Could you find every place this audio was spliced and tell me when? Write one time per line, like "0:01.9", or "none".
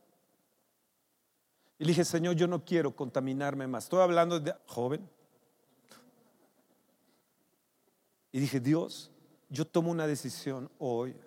0:04.6